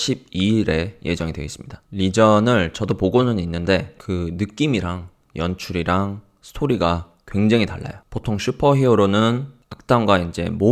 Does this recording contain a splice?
yes; 1 cut; at 4.0 s

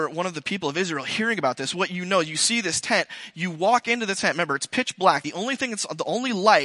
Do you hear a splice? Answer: no; 0 cuts

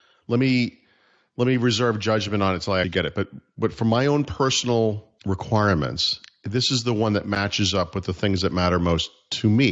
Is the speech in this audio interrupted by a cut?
yes; 2 cuts; at 2.8 s, 5.2 s

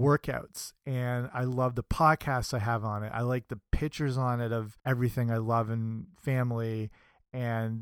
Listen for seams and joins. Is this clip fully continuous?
no; 2 cuts; at 3.1 s, 4.8 s

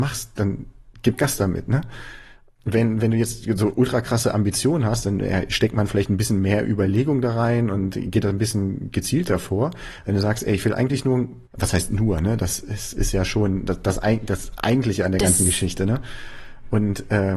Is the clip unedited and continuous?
no; 1 cut; at 11.5 s

